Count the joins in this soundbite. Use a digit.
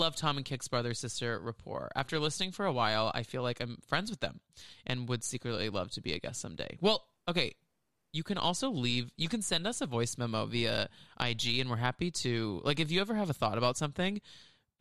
0